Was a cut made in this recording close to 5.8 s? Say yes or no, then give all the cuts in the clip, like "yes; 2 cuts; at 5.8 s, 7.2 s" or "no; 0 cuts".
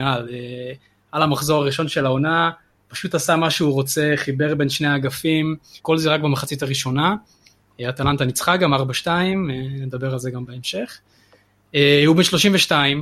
yes; 1 cut; at 5.8 s